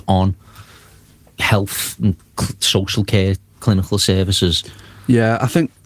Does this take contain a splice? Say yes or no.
no